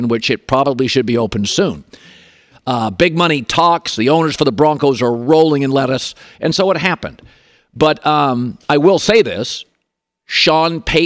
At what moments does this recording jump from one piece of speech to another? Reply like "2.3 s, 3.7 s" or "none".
2.5 s